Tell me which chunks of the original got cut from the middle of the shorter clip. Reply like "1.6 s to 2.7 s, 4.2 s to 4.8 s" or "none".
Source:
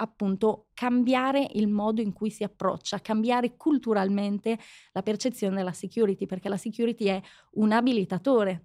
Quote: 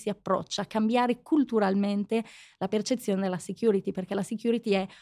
none